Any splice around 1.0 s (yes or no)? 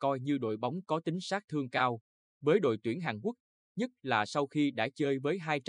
no